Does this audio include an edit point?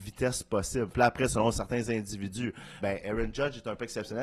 yes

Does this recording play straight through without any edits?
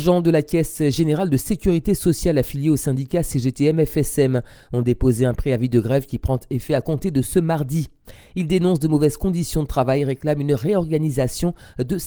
yes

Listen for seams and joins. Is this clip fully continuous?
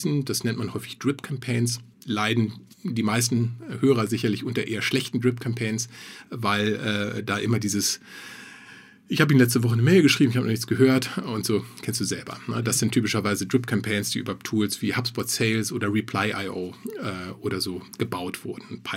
no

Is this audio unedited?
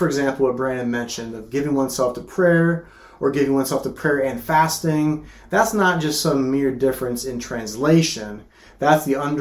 yes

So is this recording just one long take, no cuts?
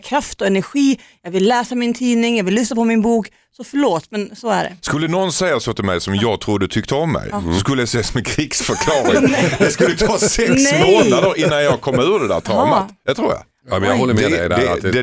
yes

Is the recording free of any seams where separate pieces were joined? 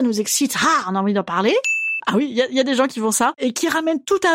no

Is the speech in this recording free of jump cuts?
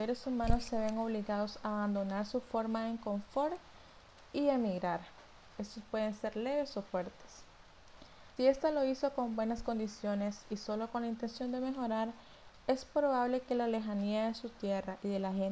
no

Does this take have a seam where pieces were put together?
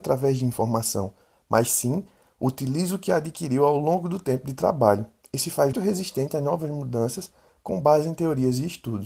yes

